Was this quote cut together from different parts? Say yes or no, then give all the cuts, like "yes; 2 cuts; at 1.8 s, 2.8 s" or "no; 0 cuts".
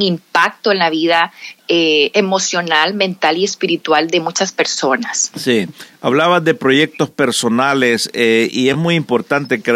no; 0 cuts